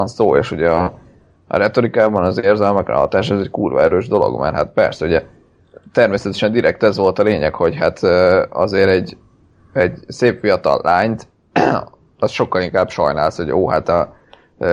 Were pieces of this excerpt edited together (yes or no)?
no